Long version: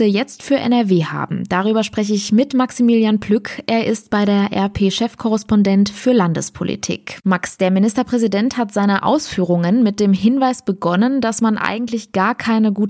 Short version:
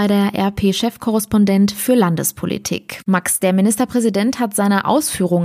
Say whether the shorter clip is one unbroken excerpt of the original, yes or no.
yes